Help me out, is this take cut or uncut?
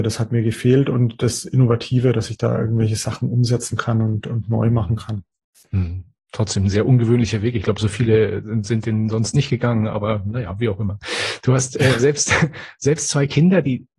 uncut